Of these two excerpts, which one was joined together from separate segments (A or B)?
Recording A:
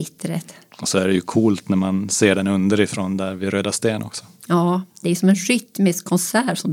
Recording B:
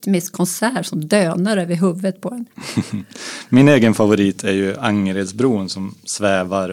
A